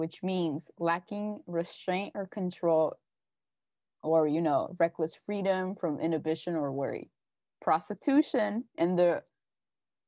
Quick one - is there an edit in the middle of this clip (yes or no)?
no